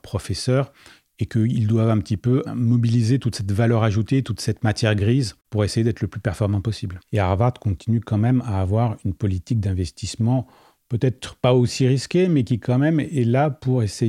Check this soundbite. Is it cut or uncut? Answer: cut